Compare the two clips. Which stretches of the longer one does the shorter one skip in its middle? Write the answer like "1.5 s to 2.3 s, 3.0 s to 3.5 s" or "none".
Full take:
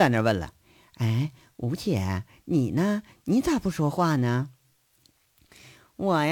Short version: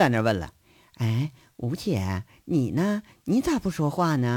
none